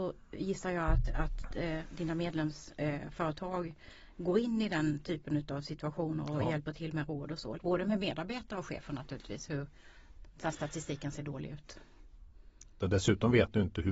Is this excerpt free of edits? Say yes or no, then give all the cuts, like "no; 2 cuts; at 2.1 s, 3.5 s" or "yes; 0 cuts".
no; 2 cuts; at 7.6 s, 12.8 s